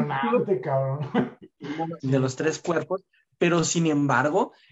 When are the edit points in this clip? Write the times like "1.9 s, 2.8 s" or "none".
2.0 s